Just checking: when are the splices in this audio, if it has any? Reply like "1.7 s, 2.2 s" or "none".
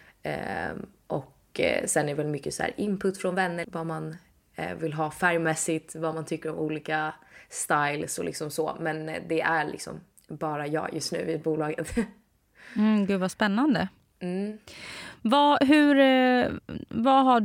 3.6 s